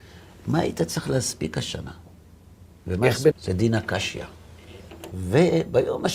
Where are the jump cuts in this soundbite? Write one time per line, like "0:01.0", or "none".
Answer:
0:03.3
0:05.1

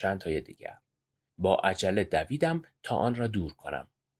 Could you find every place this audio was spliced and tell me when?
0:01.3

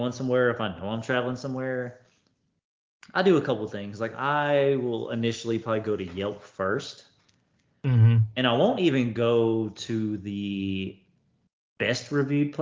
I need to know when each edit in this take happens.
none

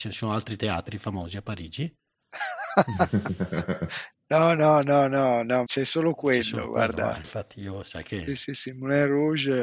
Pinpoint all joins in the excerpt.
0:05.7

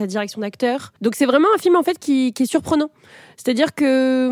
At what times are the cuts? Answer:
0:01.0

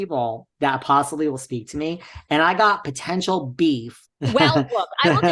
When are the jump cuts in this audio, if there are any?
0:04.0

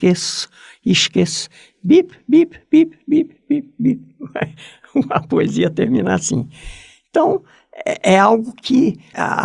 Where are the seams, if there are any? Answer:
none

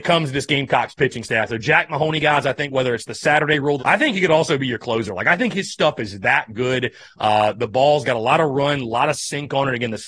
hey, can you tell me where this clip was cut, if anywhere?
0:03.8

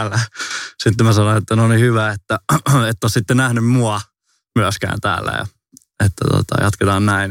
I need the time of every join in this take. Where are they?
none

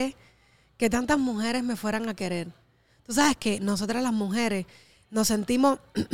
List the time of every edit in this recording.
none

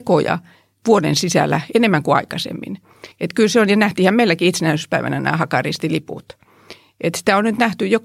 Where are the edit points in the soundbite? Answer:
0:03.1

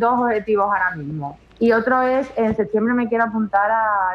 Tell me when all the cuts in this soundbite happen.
0:01.5

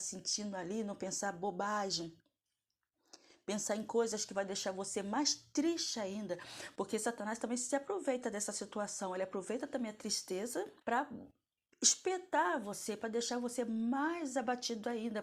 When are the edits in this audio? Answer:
0:10.8

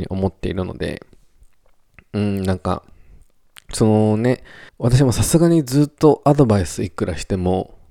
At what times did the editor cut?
0:04.7

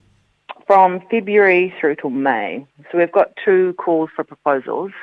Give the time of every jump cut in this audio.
none

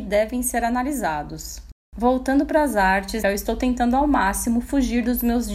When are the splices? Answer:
0:03.2

